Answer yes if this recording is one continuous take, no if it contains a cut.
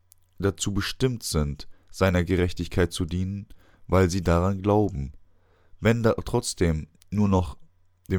yes